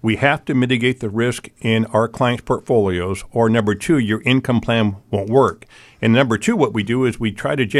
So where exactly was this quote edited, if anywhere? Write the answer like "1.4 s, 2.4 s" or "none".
none

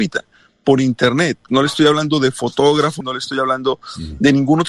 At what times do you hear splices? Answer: 1.5 s, 3.0 s

